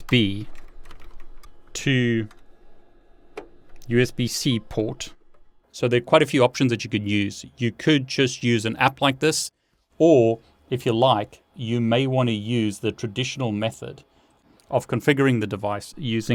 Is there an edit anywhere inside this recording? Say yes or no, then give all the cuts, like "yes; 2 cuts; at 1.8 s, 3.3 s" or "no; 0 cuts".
yes; 1 cut; at 5.6 s